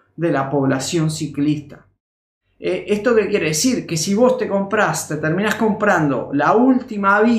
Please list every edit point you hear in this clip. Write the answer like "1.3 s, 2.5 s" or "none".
none